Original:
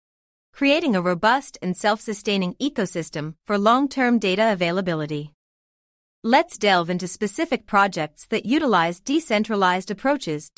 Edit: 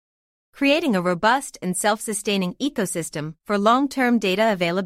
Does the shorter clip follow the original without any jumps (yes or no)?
yes